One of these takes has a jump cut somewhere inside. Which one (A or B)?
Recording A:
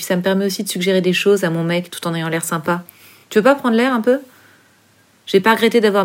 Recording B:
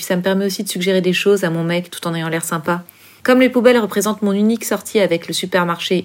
B